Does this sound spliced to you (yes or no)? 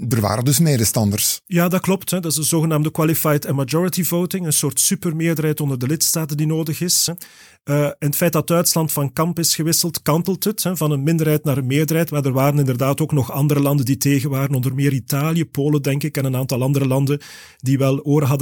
no